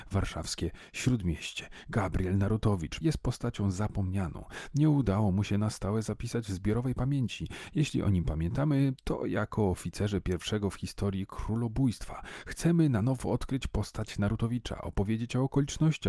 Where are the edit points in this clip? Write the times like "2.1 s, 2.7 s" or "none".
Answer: 3.0 s